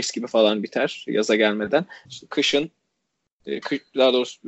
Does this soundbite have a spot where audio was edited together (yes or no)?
yes